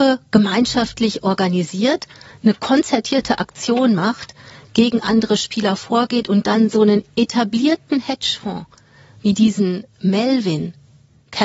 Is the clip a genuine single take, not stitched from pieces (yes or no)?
yes